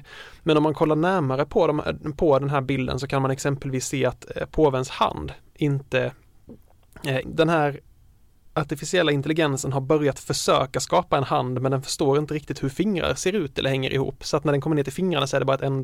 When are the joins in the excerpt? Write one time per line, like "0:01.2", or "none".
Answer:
0:07.2